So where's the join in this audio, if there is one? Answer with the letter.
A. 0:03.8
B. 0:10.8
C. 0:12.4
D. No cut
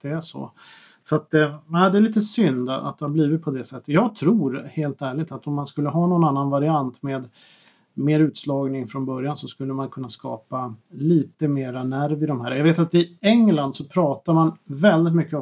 B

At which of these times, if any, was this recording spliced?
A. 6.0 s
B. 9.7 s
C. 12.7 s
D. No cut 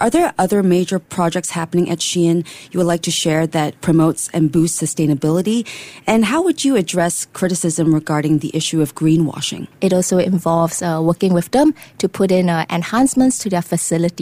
B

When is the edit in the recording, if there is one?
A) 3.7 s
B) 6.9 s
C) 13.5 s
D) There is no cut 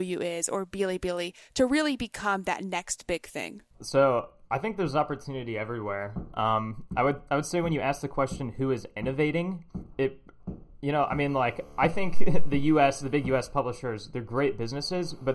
A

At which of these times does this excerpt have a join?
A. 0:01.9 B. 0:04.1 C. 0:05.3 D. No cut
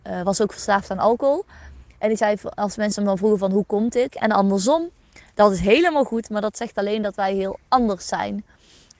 B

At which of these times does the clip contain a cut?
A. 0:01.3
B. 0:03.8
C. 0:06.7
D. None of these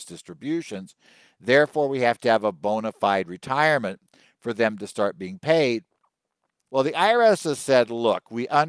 C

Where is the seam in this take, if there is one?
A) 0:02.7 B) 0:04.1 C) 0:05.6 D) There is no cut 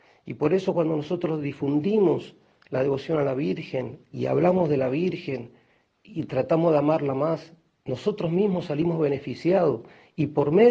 B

